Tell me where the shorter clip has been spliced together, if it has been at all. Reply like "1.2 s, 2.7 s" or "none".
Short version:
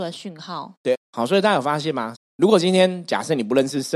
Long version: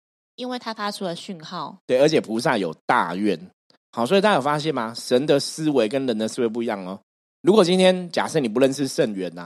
0.9 s, 2.1 s